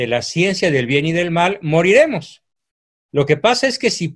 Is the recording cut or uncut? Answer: cut